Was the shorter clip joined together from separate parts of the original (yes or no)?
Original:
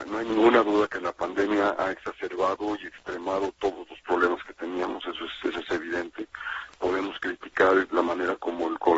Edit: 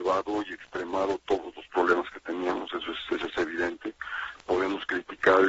no